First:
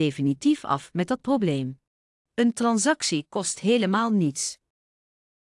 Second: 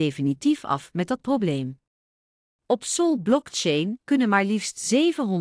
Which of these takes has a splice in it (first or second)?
first